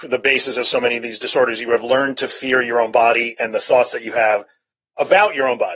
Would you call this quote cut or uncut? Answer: uncut